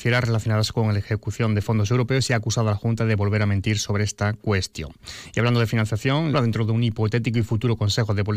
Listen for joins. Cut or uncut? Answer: cut